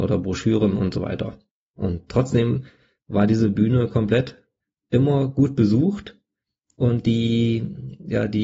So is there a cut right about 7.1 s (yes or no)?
no